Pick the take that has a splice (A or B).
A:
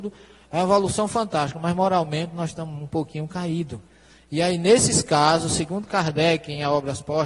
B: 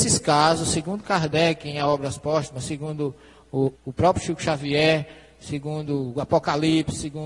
B